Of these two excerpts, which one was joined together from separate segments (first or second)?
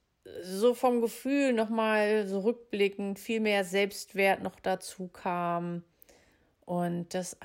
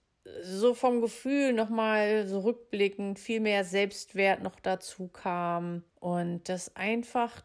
second